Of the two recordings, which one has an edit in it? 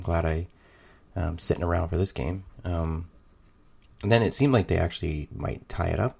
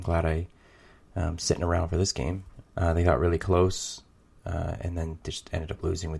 second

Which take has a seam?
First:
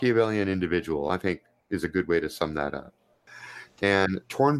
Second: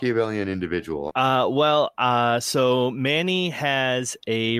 second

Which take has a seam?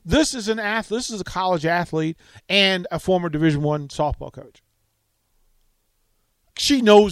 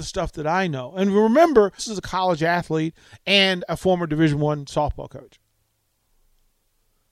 second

